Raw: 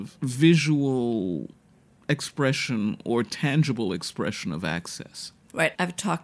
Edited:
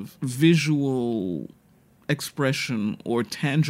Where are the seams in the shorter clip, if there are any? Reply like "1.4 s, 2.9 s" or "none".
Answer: none

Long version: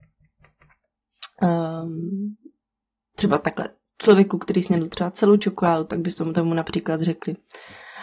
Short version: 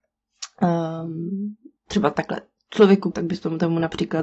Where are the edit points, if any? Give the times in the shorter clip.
1.8 s, 3.1 s

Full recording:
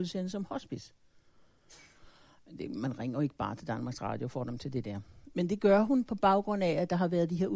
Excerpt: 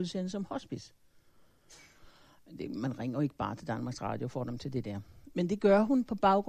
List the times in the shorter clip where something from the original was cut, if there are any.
none

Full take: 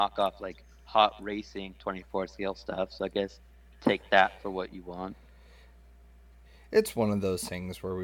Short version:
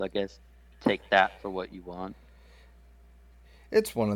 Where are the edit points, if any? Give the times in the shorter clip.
none

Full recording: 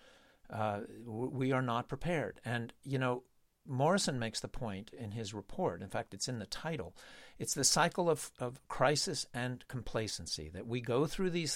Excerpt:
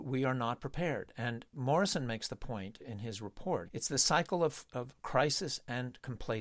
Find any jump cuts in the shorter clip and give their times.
1.5 s, 3.7 s

